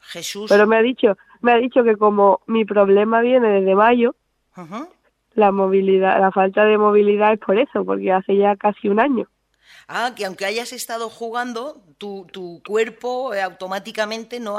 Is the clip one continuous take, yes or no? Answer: yes